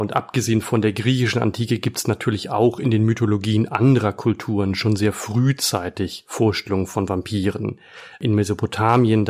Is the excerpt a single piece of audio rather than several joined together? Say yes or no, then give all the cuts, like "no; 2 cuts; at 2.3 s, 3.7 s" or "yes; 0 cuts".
yes; 0 cuts